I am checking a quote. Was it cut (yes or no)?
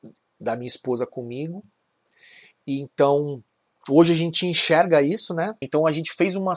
yes